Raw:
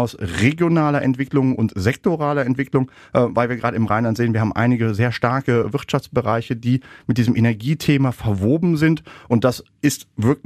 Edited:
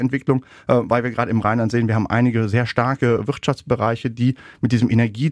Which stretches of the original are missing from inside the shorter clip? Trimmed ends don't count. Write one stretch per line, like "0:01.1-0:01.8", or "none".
none